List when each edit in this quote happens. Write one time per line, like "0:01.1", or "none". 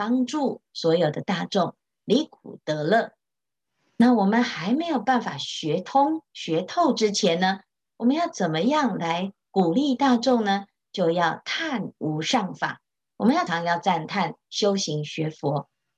0:13.5